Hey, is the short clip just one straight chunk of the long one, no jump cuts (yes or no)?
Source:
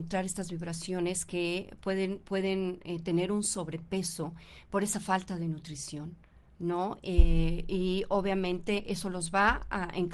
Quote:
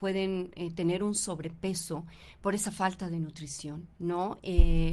no